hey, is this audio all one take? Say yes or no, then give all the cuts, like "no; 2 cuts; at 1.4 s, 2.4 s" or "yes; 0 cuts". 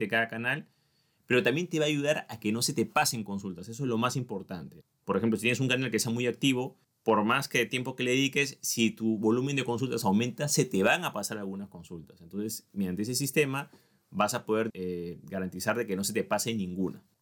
no; 1 cut; at 14.7 s